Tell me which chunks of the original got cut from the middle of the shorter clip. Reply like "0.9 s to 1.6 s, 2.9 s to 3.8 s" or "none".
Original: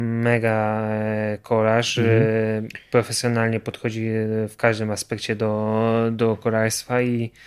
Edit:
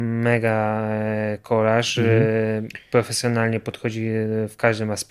none